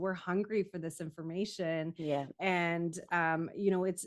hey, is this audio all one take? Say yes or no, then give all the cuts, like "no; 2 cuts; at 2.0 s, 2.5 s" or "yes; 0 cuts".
yes; 0 cuts